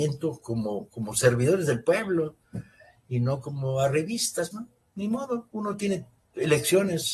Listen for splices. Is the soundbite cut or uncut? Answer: cut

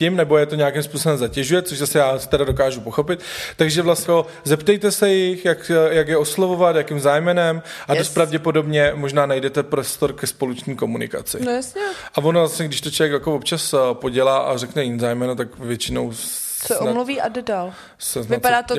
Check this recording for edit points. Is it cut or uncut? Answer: cut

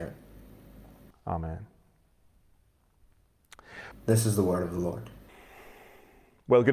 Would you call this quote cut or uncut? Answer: cut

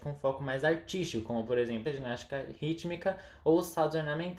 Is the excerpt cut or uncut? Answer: cut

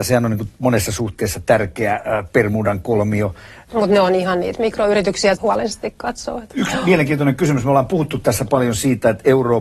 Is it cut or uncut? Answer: cut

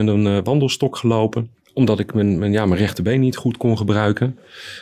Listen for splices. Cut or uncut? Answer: uncut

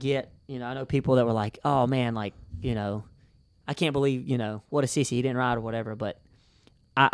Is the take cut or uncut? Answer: uncut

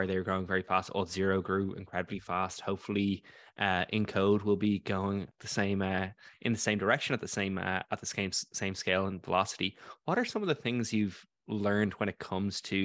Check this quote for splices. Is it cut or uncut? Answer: cut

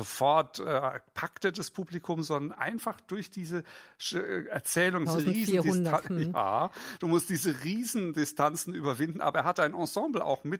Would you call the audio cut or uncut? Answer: cut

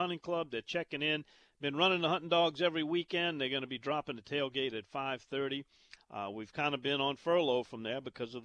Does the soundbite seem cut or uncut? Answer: cut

